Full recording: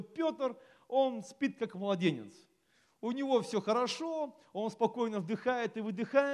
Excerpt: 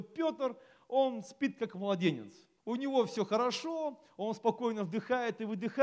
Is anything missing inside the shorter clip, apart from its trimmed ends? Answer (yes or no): yes